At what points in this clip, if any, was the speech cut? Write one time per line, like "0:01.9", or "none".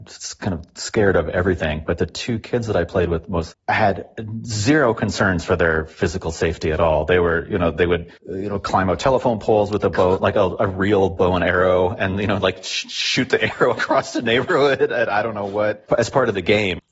0:03.5
0:08.2